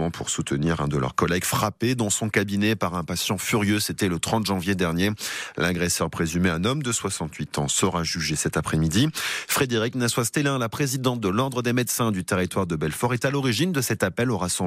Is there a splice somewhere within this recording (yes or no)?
no